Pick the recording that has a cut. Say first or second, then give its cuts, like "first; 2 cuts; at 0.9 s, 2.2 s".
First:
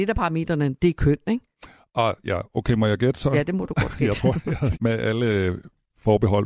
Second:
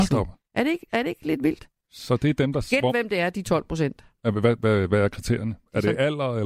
first; 1 cut; at 4.7 s